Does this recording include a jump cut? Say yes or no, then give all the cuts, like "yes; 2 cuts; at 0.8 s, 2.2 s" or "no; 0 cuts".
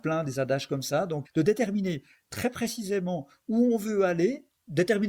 yes; 1 cut; at 1.2 s